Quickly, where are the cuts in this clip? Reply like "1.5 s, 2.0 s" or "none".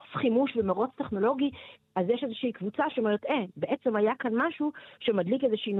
1.8 s, 3.5 s